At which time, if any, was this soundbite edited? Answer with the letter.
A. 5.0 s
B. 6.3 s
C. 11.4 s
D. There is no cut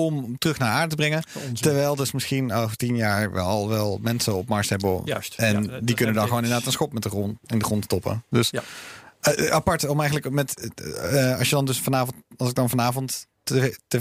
D